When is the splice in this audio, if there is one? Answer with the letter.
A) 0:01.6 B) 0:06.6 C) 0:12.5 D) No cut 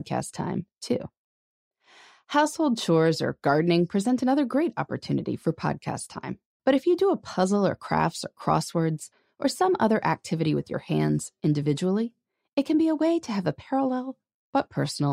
B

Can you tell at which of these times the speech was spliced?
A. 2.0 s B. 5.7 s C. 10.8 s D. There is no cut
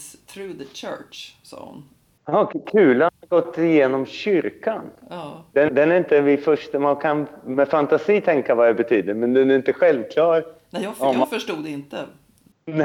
B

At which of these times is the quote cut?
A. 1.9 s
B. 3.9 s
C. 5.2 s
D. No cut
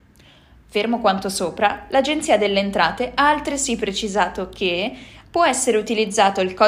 C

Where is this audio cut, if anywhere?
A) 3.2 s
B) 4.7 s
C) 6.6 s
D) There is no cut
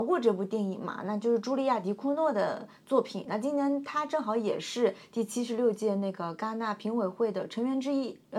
D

